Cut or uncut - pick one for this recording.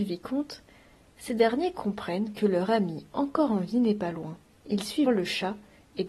cut